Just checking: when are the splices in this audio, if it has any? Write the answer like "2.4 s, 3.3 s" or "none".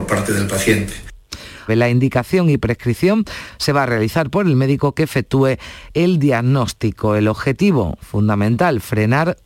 1.7 s